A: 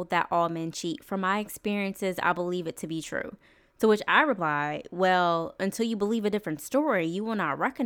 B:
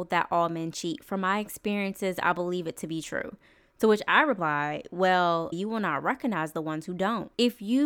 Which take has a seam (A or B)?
B